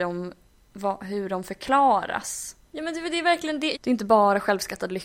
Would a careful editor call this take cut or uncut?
cut